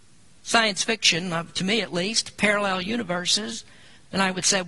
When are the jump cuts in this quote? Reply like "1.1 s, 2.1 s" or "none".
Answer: none